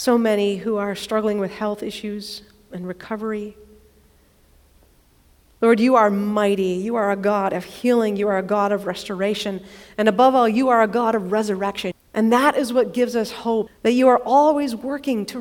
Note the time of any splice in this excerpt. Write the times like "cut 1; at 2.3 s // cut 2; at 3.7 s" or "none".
cut 1; at 11.9 s // cut 2; at 13.7 s